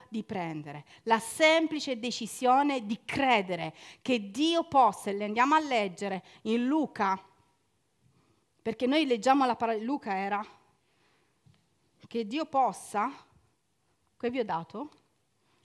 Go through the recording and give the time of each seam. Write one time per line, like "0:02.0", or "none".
none